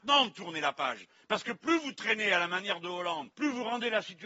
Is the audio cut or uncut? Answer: cut